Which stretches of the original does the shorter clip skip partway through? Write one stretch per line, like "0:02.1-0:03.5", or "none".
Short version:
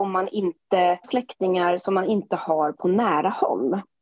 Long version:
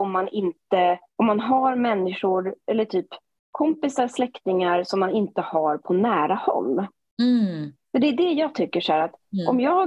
0:01.0-0:04.1